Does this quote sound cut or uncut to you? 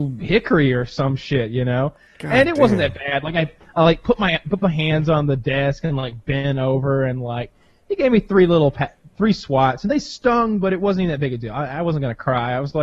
uncut